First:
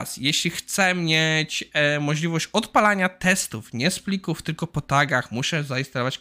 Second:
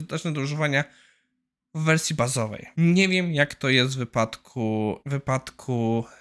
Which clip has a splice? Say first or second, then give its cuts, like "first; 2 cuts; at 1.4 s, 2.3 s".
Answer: second; 2 cuts; at 2.7 s, 5.0 s